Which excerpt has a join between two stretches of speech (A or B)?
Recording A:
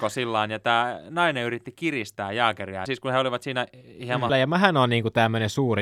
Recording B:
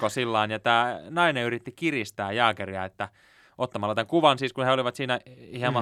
A